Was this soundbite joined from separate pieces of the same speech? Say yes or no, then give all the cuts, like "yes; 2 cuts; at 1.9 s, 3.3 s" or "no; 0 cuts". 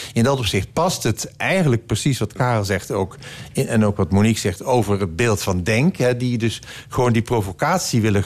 no; 0 cuts